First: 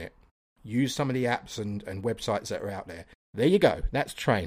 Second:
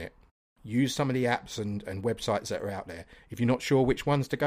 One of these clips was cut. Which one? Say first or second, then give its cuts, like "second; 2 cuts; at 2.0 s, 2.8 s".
first; 1 cut; at 3.1 s